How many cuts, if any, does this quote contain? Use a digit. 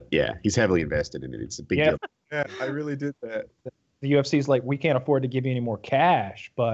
2